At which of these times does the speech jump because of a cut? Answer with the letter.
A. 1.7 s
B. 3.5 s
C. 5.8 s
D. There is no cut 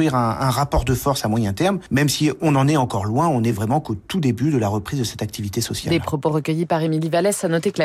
D